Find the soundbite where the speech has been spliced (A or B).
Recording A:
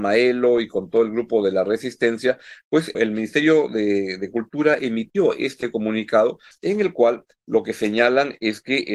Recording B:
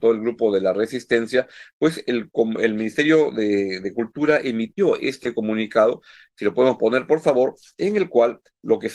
A